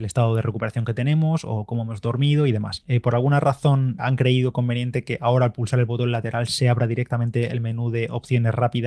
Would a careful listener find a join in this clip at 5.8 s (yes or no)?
no